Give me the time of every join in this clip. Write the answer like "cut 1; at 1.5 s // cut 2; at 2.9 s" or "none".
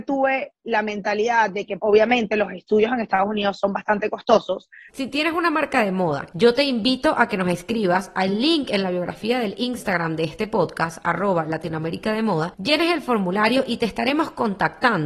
cut 1; at 1.8 s // cut 2; at 4.9 s // cut 3; at 6.3 s